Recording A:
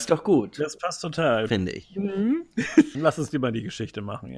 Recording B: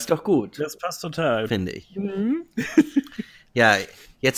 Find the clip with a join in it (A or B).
A